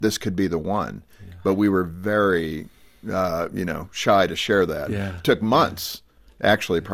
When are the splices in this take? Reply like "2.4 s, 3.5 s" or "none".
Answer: none